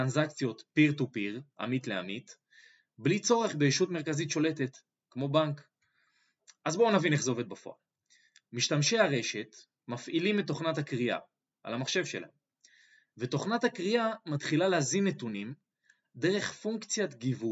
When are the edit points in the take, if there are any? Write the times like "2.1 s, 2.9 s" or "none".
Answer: none